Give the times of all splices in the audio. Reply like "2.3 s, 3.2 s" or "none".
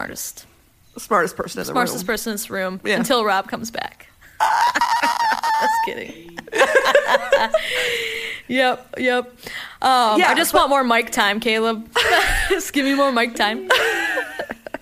none